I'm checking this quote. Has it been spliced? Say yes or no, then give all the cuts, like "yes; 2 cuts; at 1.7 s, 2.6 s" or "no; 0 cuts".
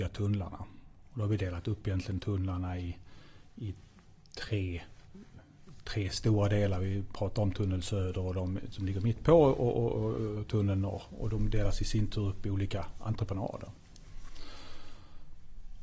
no; 0 cuts